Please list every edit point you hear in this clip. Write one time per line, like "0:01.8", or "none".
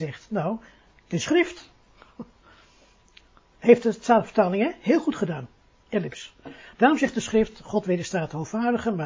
none